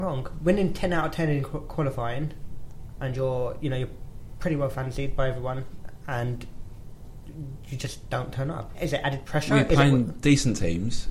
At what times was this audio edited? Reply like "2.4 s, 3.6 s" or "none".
3.0 s, 8.7 s